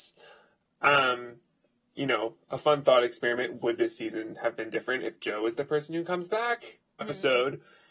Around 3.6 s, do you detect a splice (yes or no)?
no